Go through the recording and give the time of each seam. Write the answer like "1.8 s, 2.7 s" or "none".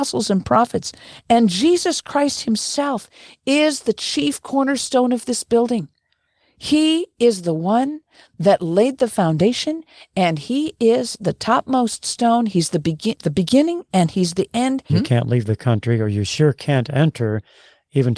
13.2 s, 14.9 s